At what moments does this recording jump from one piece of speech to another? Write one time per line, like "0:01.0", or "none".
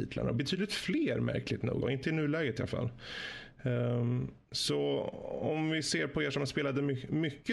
0:01.8

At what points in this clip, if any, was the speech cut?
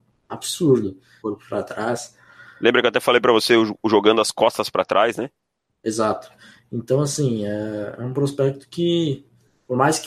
0:01.2

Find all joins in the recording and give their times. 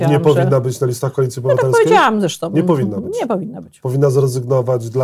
none

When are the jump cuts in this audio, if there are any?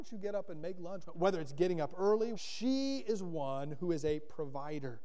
0:01.0
0:02.3

